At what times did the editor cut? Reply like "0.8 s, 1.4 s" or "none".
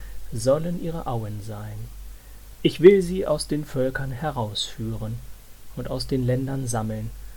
2.6 s